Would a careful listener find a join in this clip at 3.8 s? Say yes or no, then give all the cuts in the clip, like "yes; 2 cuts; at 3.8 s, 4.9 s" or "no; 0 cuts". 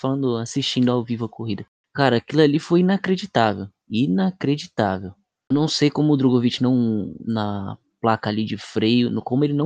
no; 1 cut; at 7.2 s